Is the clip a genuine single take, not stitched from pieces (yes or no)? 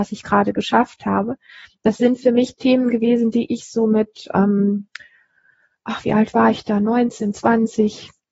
yes